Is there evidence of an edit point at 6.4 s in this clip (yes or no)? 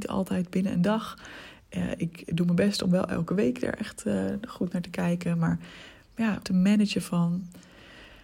yes